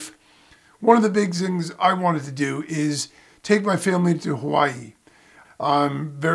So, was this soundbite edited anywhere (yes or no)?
yes